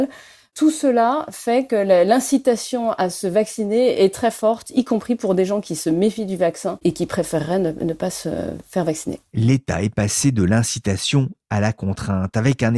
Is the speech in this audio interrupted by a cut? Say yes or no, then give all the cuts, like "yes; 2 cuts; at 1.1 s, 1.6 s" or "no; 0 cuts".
no; 0 cuts